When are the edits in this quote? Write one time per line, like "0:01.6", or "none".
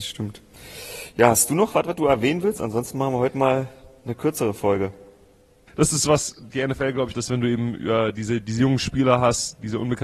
0:05.7
0:07.1